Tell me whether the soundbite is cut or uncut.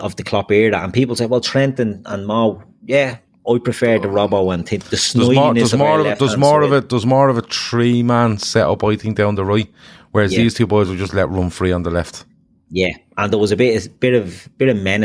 uncut